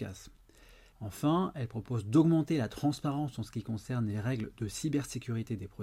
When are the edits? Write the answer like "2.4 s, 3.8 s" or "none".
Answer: 0.9 s

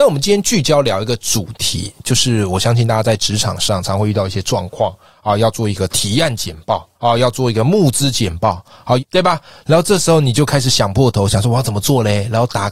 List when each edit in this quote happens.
6.9 s, 9.0 s

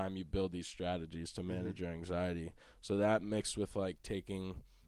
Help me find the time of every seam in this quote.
none

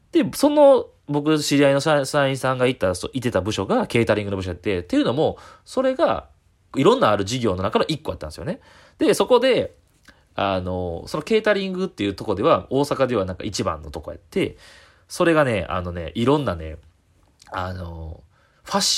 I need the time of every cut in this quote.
6.7 s

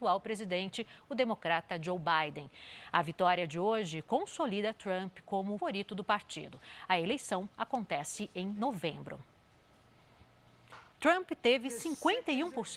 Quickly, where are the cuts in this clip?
5.6 s, 10.9 s

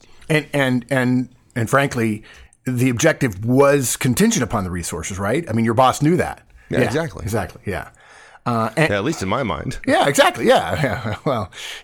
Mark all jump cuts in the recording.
none

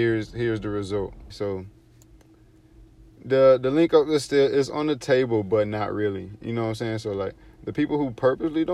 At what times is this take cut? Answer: 1.3 s

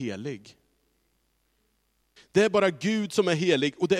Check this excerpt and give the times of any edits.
2.2 s

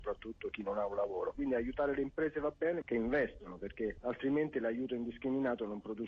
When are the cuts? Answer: 1.3 s, 2.8 s

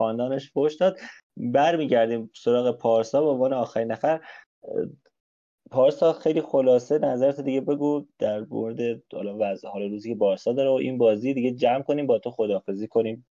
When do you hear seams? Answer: none

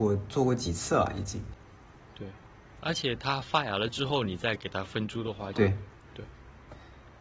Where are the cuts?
5.5 s

